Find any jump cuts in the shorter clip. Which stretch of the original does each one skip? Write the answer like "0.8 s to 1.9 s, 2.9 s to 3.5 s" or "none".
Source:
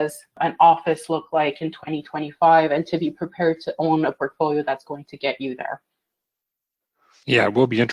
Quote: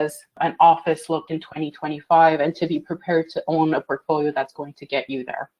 1.3 s to 1.6 s